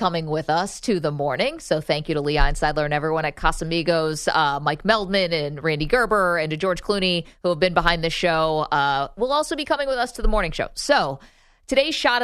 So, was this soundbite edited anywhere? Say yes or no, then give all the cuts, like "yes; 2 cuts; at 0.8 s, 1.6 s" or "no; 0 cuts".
no; 0 cuts